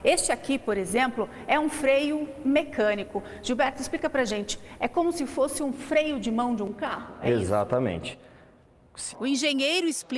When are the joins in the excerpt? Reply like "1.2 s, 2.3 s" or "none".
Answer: 9.1 s